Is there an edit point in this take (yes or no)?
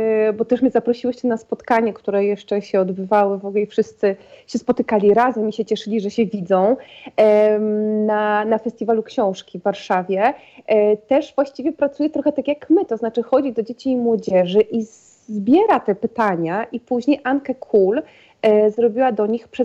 no